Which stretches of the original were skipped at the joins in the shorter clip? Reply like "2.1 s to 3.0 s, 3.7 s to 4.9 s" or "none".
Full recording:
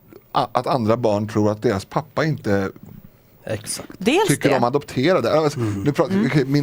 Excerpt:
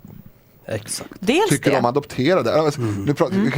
none